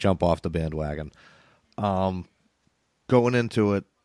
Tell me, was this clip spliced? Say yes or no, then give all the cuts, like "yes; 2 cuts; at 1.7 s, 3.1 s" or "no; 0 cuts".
no; 0 cuts